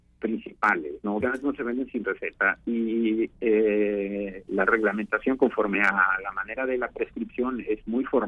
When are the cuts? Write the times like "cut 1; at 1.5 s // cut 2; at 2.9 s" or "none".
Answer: cut 1; at 1.2 s // cut 2; at 4.5 s